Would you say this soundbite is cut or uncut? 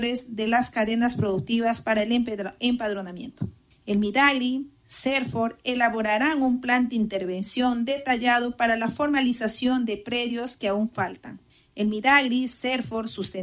uncut